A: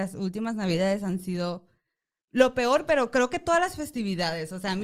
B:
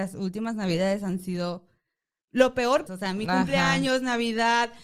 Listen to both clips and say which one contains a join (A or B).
B